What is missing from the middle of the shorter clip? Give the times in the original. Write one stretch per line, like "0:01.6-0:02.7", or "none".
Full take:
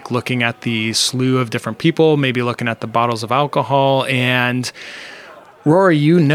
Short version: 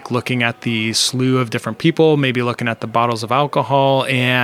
none